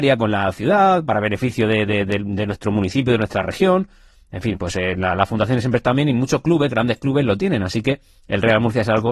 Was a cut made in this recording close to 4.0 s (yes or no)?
no